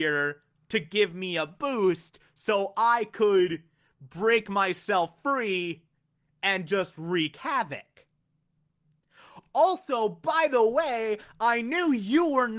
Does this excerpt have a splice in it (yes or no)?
no